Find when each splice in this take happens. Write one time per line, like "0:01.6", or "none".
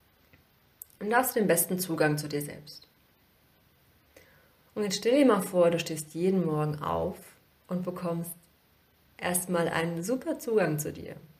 none